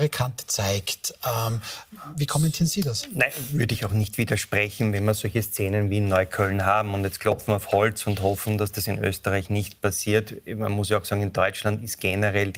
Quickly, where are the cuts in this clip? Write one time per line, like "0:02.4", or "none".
none